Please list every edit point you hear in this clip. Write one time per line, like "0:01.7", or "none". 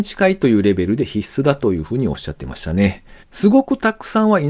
0:03.2